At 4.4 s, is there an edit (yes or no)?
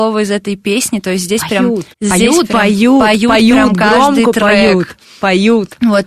no